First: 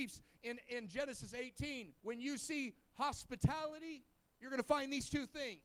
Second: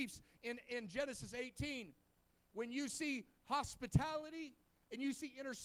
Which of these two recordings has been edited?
first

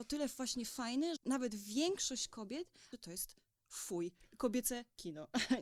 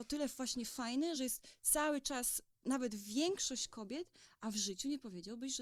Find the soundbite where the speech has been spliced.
first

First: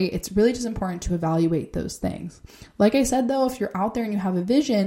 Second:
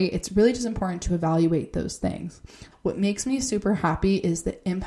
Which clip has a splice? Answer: second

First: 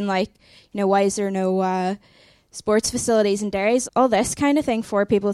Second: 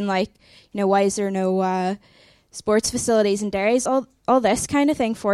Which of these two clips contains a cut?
first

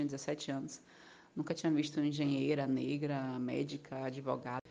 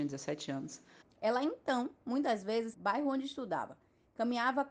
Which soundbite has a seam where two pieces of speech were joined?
second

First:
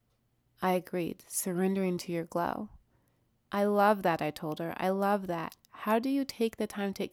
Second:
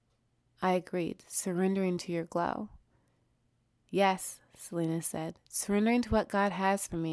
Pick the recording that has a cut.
first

